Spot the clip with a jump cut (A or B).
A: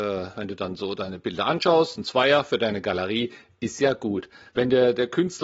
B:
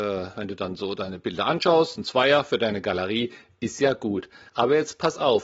A